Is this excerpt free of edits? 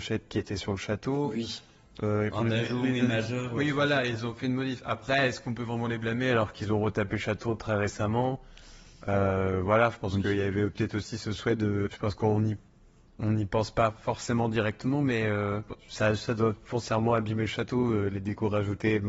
yes; 0 cuts

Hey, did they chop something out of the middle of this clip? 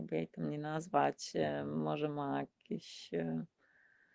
no; 0 cuts

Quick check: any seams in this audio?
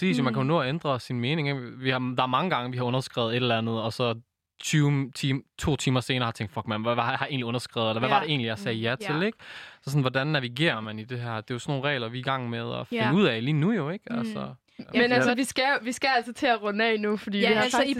no; 0 cuts

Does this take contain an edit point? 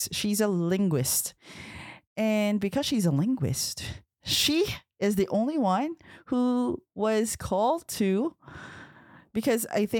no; 0 cuts

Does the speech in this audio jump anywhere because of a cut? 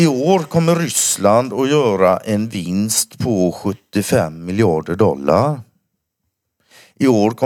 no; 0 cuts

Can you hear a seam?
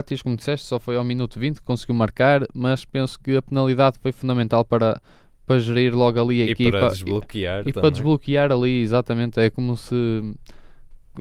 no; 0 cuts

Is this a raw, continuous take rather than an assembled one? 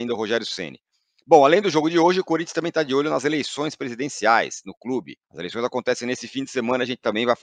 no; 1 cut; at 5.2 s

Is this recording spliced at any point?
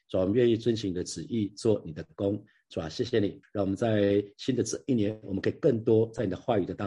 yes; 1 cut; at 3.4 s

